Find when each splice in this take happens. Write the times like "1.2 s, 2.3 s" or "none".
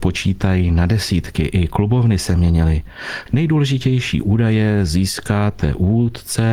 3.3 s